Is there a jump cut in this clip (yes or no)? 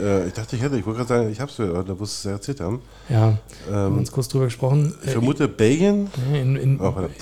no